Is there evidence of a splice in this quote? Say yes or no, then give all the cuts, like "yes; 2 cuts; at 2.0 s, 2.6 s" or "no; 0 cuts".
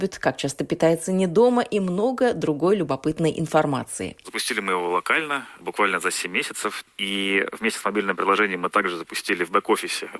no; 0 cuts